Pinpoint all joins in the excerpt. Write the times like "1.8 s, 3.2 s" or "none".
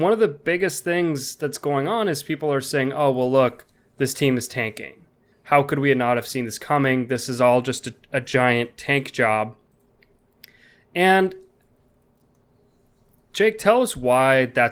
5.3 s